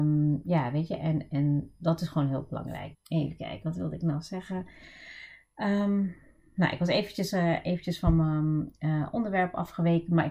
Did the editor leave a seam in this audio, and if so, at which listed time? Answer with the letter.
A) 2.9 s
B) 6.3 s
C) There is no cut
A